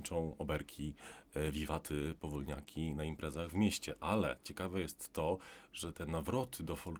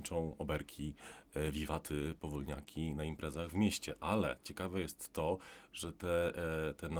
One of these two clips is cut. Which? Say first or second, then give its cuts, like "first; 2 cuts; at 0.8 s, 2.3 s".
first; 1 cut; at 5.9 s